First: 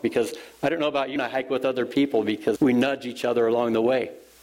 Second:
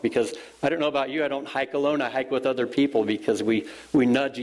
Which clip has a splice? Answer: first; 2 cuts; at 1.2 s, 2.6 s

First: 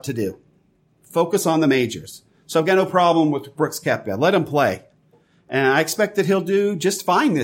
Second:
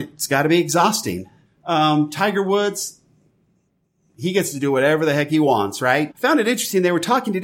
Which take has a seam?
second; 2 cuts; at 1.4 s, 6.1 s

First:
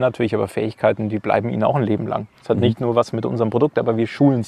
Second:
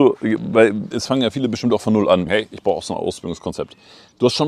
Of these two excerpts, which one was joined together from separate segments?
second; 2 cuts; at 0.9 s, 2.3 s

